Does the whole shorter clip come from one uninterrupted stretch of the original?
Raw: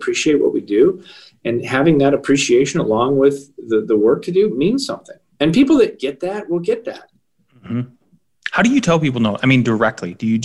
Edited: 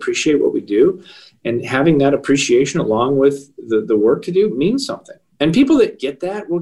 yes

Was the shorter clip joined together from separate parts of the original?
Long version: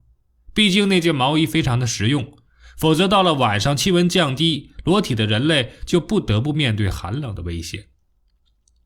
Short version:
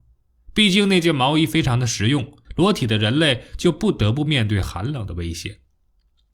yes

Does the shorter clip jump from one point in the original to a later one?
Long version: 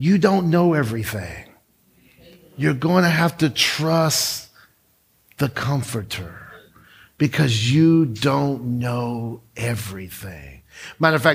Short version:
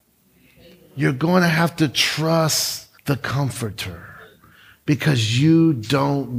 yes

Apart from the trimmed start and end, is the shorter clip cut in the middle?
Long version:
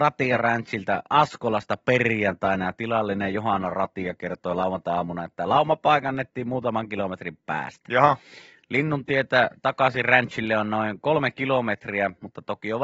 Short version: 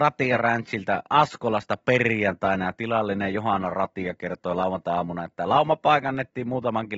no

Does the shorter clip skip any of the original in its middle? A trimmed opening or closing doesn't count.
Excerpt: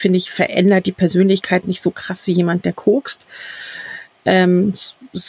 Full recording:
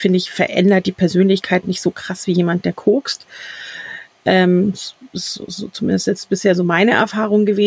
no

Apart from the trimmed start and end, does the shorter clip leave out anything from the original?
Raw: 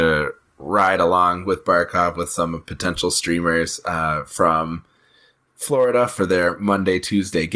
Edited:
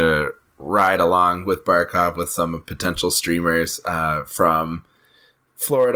no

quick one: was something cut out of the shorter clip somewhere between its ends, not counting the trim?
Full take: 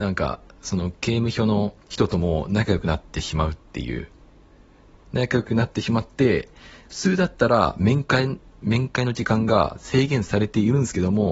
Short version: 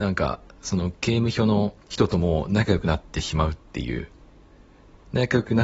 no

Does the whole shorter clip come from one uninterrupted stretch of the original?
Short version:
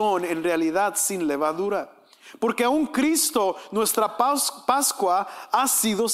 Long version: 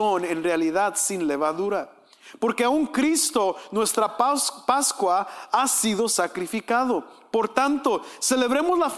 yes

